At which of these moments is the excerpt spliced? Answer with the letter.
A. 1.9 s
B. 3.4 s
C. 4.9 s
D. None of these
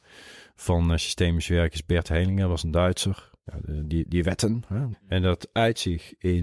C